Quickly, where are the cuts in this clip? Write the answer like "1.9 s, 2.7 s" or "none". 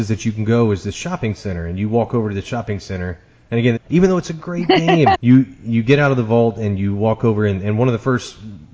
3.8 s, 5.1 s